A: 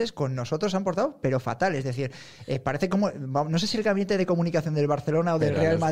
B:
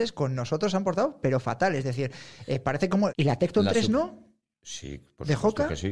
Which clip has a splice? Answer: B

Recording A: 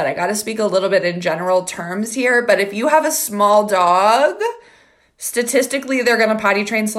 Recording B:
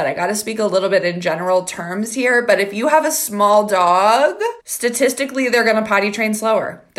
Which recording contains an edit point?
B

